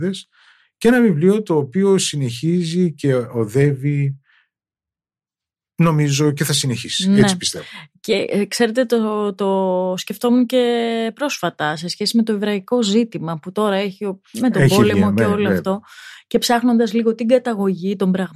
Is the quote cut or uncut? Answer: uncut